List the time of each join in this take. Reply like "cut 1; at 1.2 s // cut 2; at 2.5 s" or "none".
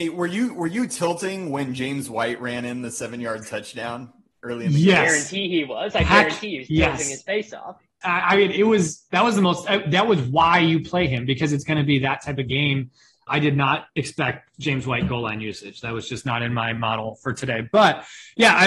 cut 1; at 8.0 s // cut 2; at 13.3 s // cut 3; at 14.5 s